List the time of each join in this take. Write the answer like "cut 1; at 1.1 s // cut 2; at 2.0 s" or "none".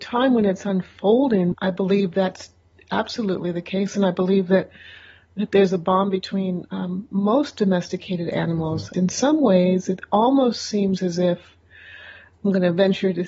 cut 1; at 1.5 s // cut 2; at 8.9 s